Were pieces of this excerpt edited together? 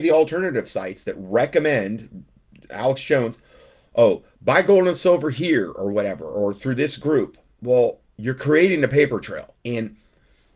yes; 1 cut; at 9.5 s

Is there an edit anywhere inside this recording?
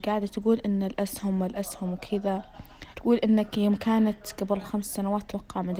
yes; 1 cut; at 2.9 s

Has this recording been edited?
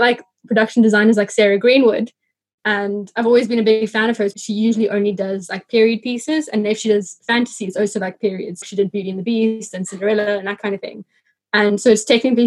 yes; 2 cuts; at 4.3 s, 8.6 s

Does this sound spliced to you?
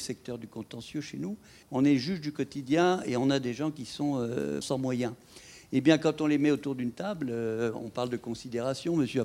yes; 2 cuts; at 1.6 s, 4.6 s

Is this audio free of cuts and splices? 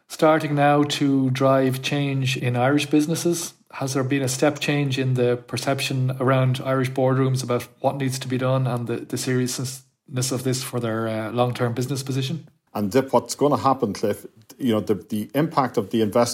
no; 1 cut; at 12.7 s

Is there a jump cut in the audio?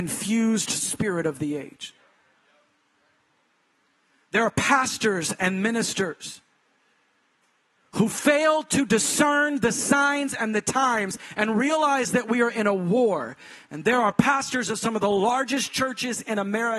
no; 0 cuts

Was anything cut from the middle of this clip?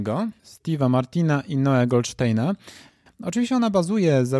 yes; 1 cut; at 3.1 s

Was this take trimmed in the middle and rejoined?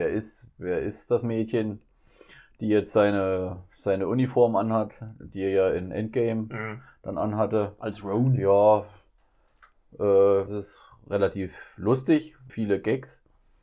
yes; 2 cuts; at 10.5 s, 12.5 s

